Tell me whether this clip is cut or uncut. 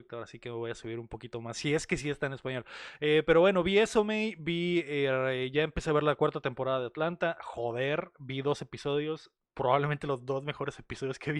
uncut